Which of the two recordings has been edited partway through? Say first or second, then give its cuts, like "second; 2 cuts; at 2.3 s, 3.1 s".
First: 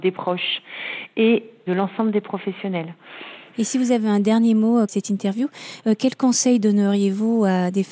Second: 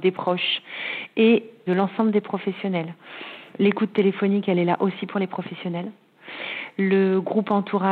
first; 2 cuts; at 3.5 s, 4.9 s